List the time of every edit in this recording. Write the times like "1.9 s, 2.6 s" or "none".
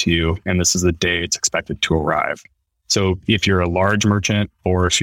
none